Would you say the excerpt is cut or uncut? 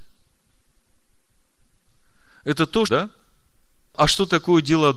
cut